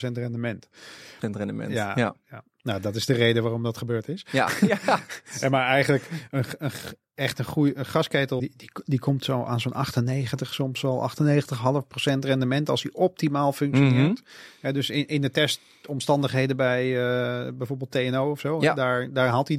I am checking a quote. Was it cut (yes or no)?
yes